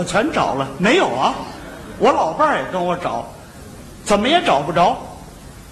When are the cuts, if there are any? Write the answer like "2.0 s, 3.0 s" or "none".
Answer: none